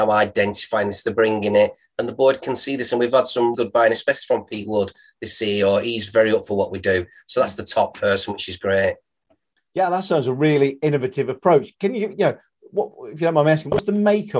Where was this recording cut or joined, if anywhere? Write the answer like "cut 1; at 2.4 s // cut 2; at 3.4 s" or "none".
cut 1; at 3.5 s